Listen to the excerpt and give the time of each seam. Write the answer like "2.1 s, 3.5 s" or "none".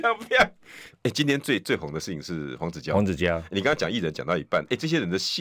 0.9 s